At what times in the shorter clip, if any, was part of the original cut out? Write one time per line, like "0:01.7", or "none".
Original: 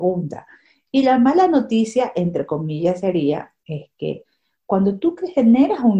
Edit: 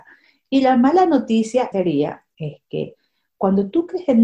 0:01.7